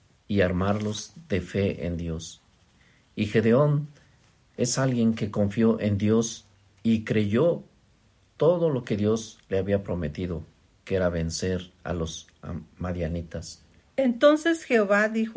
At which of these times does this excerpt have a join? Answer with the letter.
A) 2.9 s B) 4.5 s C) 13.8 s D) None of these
C